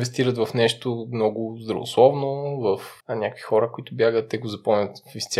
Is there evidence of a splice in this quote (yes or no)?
yes